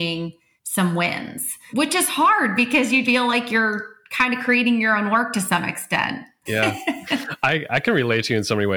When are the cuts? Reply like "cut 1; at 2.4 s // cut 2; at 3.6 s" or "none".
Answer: cut 1; at 3.0 s // cut 2; at 6.5 s